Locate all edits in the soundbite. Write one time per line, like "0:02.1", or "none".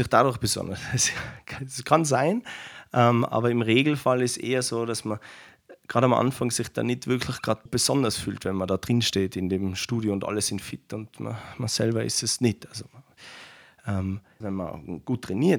0:07.7
0:14.4